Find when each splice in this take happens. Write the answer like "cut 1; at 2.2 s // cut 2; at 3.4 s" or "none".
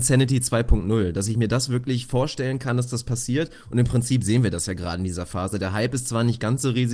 none